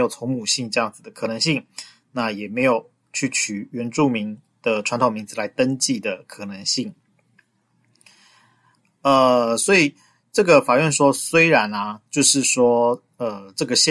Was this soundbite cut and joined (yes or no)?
no